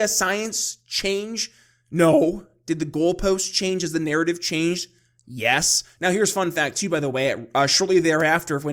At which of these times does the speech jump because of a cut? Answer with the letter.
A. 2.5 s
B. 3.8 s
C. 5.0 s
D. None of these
D